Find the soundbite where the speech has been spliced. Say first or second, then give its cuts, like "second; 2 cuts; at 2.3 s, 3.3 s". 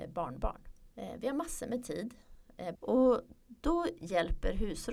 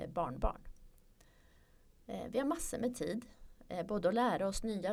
first; 2 cuts; at 0.9 s, 2.7 s